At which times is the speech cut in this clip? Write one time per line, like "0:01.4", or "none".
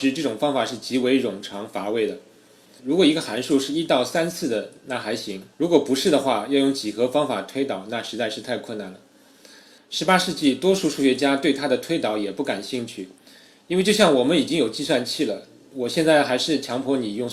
0:02.8
0:05.5